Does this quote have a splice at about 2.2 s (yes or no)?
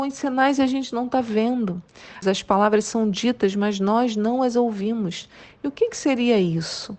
yes